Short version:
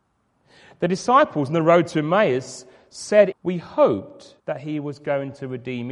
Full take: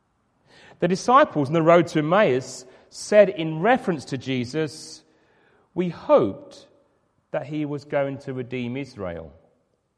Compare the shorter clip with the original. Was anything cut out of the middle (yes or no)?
yes